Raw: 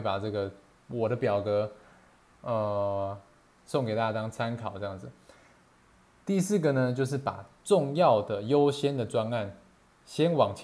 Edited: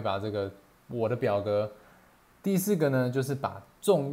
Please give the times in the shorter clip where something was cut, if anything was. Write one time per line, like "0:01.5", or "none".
0:02.3